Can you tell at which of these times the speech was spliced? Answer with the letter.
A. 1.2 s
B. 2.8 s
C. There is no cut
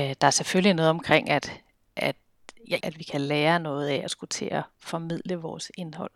B